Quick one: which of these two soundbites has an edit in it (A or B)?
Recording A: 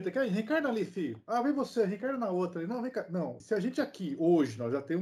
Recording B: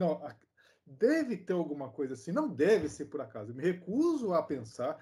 A